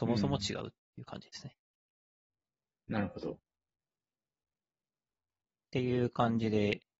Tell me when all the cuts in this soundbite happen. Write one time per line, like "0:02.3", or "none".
none